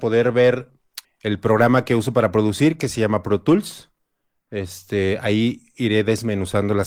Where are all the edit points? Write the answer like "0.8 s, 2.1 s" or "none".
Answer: 1.0 s

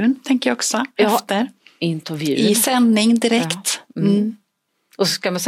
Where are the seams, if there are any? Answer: none

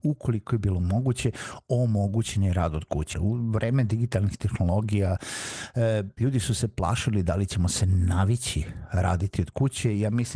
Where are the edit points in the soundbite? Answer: 3.1 s

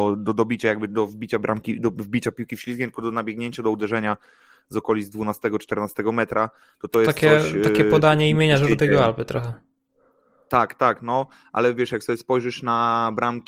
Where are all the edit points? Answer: none

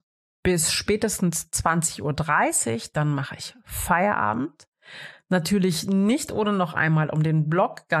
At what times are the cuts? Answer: none

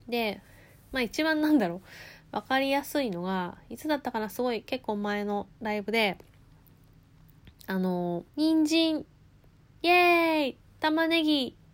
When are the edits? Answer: 8.3 s

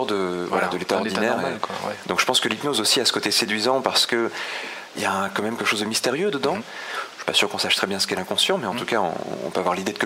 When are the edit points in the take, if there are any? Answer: 2.0 s, 4.9 s, 6.6 s

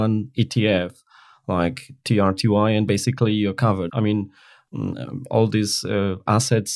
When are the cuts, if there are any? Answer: 3.9 s

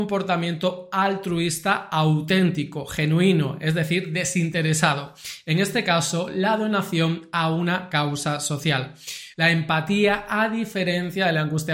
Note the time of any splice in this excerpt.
9.3 s

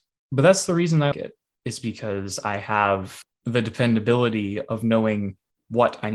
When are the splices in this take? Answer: 1.1 s

